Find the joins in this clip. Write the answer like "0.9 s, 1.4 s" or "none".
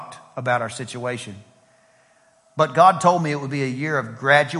none